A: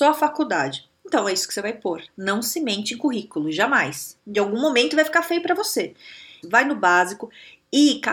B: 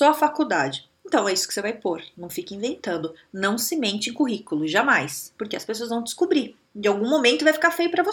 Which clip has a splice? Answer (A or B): A